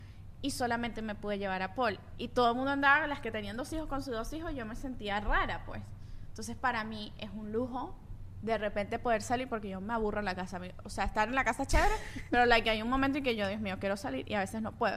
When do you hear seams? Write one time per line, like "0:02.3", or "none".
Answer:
none

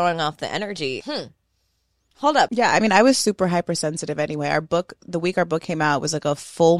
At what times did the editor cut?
0:01.0
0:02.5

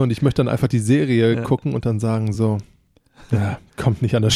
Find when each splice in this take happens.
none

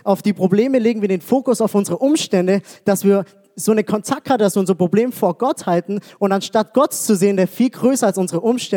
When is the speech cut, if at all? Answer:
none

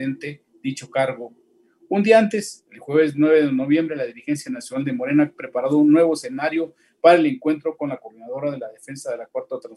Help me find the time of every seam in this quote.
none

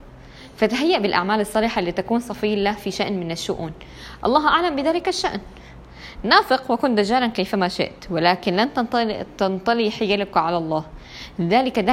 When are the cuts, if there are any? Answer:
none

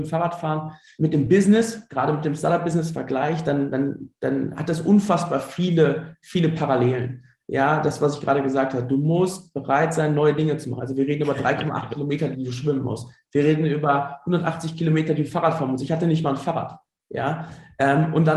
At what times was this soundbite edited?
0:10.8

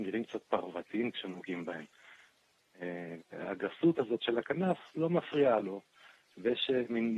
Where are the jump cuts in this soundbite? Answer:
0:03.2

